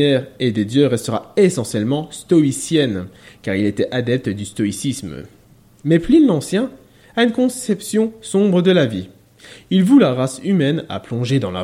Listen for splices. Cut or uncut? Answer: uncut